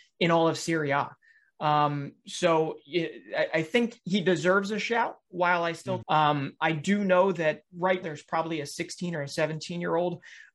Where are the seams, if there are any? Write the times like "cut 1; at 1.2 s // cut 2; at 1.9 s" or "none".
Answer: cut 1; at 6.0 s // cut 2; at 8.0 s